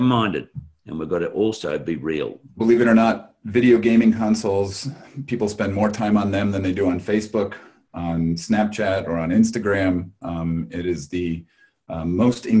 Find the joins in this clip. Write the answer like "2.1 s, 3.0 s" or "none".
2.5 s